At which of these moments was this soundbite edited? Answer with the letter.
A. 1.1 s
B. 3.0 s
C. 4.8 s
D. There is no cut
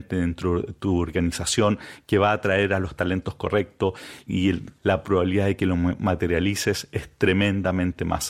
C